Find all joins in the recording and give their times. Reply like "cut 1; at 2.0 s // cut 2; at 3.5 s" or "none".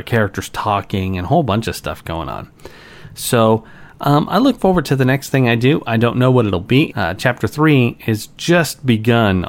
cut 1; at 6.9 s